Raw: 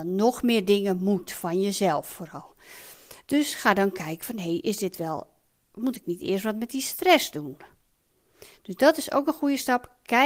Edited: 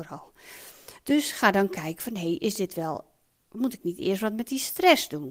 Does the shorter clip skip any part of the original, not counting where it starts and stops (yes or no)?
no